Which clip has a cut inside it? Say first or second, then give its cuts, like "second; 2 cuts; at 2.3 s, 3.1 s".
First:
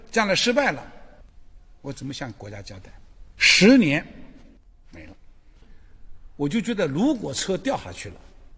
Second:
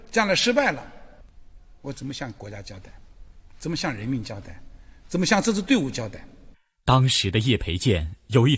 first; 1 cut; at 3.4 s